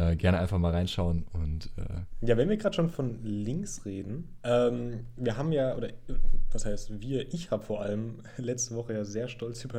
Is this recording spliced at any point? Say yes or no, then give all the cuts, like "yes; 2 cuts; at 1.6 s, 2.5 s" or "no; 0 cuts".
no; 0 cuts